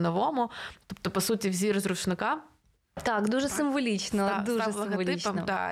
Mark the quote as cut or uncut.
uncut